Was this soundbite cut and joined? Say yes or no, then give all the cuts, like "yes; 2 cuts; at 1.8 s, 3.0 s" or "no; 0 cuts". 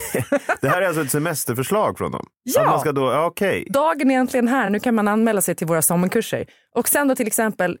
no; 0 cuts